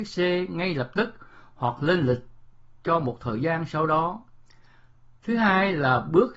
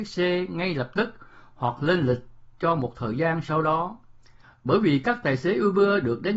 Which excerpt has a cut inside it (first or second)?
second